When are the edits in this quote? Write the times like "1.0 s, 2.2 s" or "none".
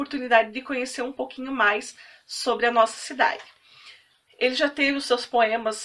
4.3 s